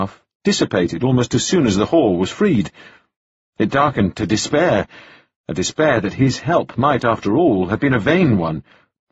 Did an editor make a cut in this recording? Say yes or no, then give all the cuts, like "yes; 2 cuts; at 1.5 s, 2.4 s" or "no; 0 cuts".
no; 0 cuts